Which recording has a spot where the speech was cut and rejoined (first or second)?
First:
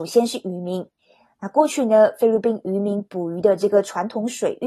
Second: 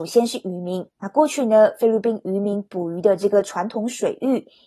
second